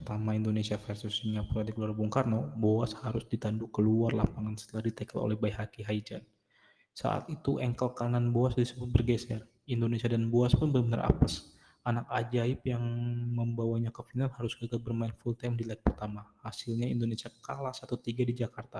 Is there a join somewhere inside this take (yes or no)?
no